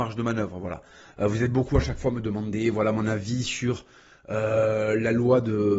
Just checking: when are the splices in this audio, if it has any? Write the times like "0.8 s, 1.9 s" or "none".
none